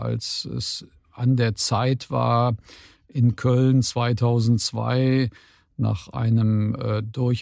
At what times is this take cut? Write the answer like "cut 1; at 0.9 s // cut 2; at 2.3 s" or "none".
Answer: none